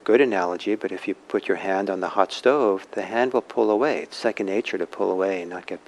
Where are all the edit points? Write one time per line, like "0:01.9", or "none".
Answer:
none